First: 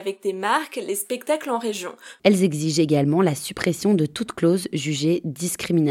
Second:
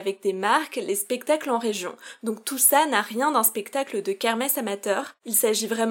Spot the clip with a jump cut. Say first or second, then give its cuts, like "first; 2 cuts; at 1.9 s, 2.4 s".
first; 1 cut; at 2.2 s